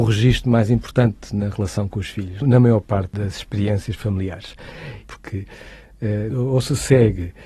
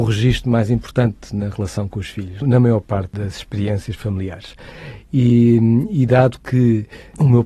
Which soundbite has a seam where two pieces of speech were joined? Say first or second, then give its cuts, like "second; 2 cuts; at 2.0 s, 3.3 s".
first; 2 cuts; at 5.0 s, 6.3 s